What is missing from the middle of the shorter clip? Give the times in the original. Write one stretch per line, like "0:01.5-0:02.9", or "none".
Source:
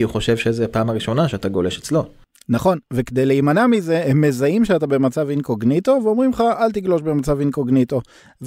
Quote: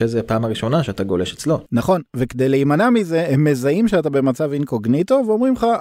0:02.1-0:02.4